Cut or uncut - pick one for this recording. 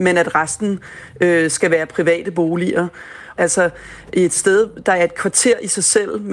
cut